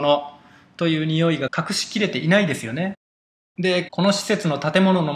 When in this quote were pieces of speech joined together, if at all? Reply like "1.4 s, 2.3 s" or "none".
3.4 s